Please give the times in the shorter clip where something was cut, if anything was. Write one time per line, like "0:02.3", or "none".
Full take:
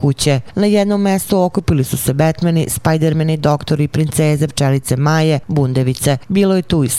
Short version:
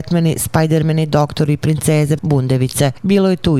0:02.2